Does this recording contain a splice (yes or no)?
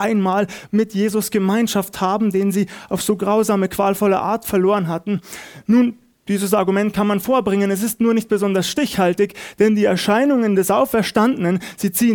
no